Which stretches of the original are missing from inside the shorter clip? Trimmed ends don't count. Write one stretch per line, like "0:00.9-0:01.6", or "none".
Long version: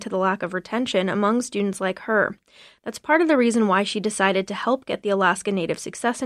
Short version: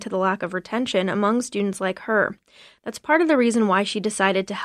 none